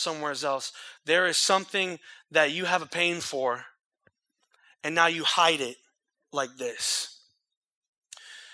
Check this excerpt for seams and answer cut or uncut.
uncut